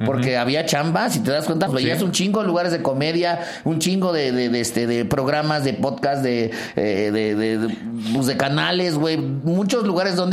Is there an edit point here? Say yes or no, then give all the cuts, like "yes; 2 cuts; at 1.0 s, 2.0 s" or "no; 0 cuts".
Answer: yes; 1 cut; at 1.7 s